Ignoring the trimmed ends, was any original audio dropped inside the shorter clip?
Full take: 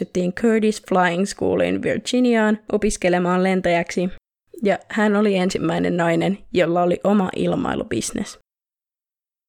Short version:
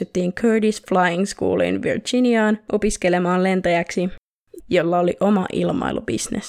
yes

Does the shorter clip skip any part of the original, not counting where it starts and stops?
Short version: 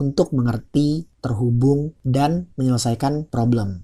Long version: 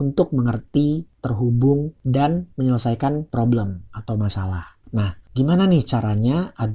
no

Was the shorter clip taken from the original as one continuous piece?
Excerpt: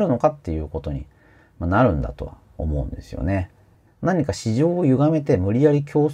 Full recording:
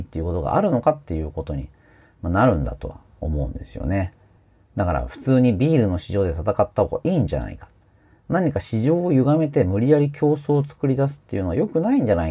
no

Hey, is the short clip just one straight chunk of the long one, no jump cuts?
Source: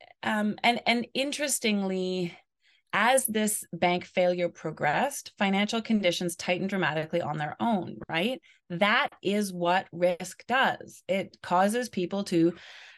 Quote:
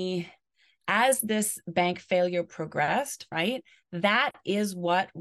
no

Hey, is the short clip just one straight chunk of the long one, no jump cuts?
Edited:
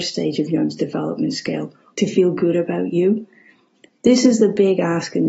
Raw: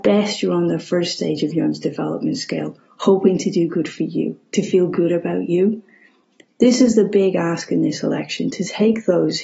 no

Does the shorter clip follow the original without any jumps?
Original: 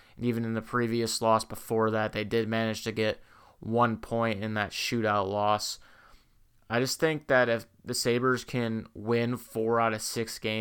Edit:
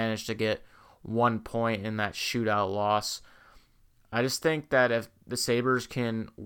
yes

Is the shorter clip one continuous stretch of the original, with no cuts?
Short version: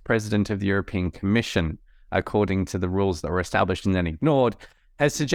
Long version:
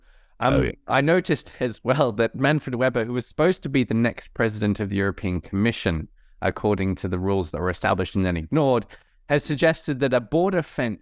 yes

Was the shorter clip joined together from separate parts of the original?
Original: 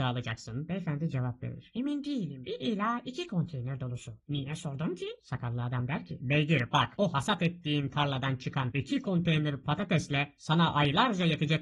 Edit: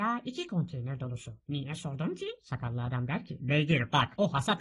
no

